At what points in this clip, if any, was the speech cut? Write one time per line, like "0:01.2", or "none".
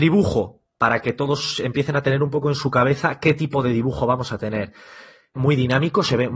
0:05.3